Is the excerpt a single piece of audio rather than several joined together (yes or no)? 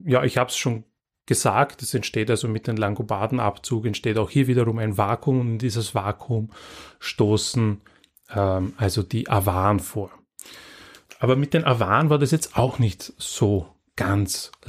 yes